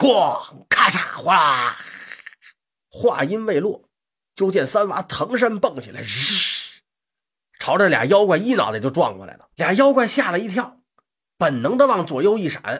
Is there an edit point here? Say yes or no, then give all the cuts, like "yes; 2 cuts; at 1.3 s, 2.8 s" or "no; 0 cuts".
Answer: yes; 2 cuts; at 2.8 s, 9.5 s